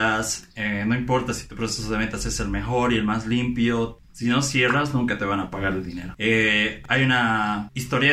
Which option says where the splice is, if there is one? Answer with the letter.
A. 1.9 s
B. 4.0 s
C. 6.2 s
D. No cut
B